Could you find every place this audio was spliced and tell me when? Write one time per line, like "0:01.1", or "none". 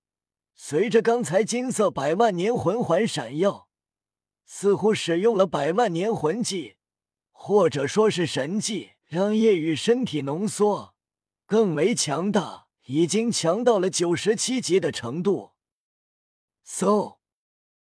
0:09.0
0:12.8
0:16.5